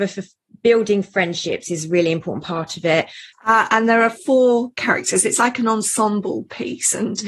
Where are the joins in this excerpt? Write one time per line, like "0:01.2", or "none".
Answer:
0:03.3